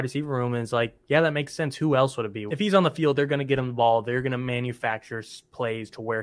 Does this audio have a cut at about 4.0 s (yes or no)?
no